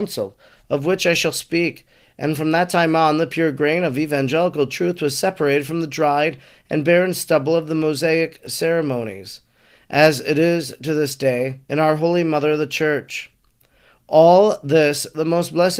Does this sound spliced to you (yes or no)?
yes